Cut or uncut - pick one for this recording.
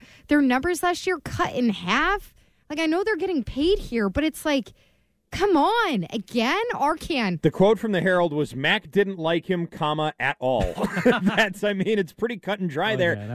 uncut